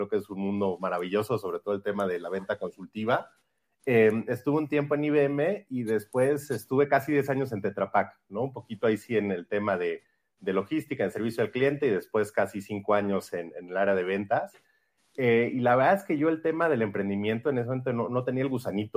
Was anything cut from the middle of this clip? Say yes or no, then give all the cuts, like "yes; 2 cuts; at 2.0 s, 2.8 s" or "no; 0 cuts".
no; 0 cuts